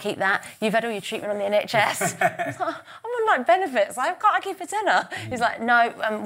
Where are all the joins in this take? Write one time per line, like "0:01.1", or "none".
none